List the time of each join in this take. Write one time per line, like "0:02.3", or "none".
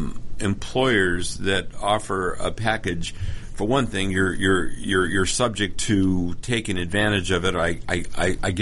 none